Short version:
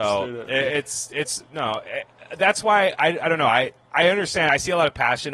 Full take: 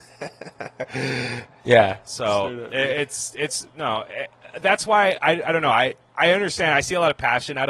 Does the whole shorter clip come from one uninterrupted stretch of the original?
yes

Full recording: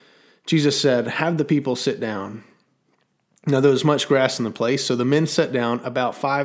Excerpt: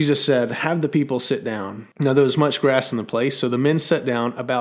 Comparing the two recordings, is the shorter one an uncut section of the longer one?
no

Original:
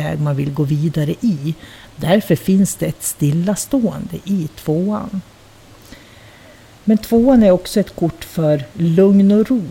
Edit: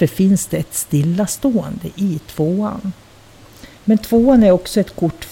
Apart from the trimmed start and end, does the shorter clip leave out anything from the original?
yes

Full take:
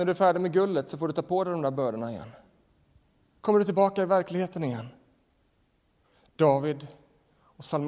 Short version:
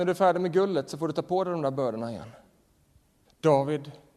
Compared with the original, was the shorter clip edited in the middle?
yes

